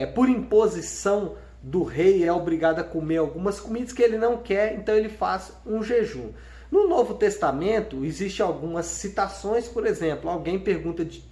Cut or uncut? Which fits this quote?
uncut